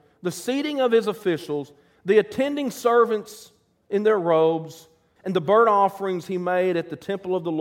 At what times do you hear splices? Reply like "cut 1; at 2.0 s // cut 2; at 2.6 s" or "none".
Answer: cut 1; at 5.2 s